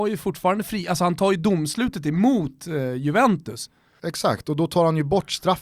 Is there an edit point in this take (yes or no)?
yes